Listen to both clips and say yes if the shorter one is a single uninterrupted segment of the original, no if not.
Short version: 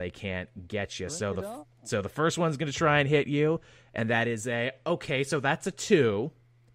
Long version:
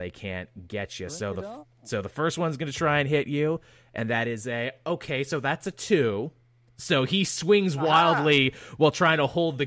yes